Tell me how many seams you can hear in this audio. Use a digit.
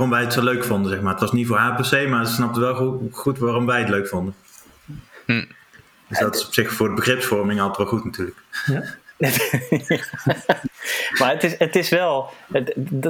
0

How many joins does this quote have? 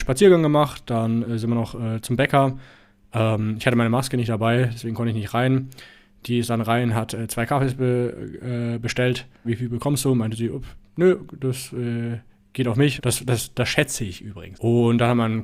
3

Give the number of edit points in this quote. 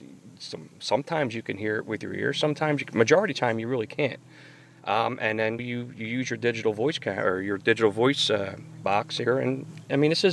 1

